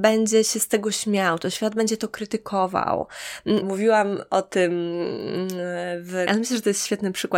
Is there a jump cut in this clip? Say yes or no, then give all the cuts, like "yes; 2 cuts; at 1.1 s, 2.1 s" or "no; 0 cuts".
yes; 2 cuts; at 3.6 s, 6.3 s